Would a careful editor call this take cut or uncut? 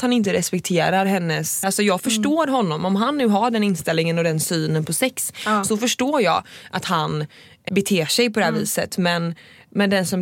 cut